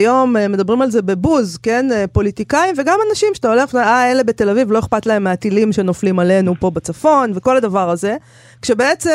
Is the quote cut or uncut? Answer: uncut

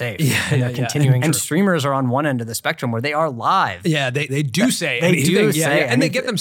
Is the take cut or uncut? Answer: cut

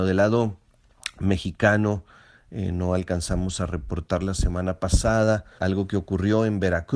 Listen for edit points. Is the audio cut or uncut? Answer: cut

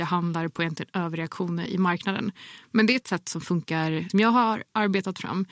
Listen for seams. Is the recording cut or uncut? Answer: cut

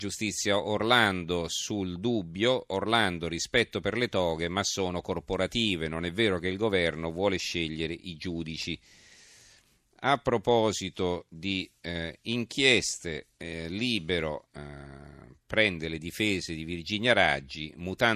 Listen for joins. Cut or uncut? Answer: uncut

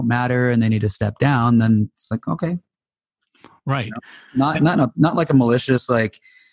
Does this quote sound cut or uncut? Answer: uncut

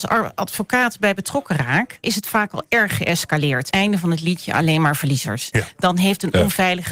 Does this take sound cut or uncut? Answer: cut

